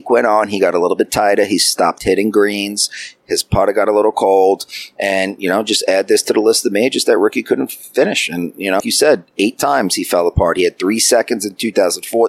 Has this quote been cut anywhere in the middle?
yes; 1 cut; at 8.8 s

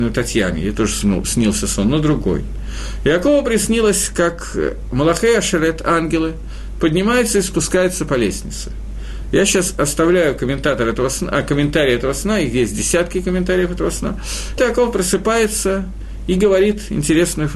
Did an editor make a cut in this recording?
yes; 1 cut; at 14.6 s

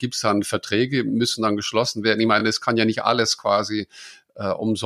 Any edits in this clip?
no; 0 cuts

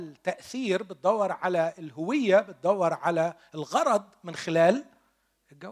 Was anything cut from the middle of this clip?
no; 0 cuts

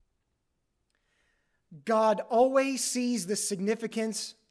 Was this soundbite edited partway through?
no; 0 cuts

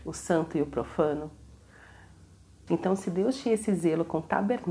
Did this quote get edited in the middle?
yes; 1 cut; at 2.7 s

